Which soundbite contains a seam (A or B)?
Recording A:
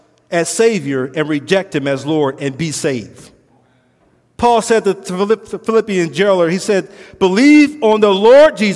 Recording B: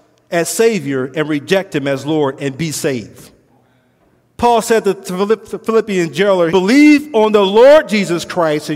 B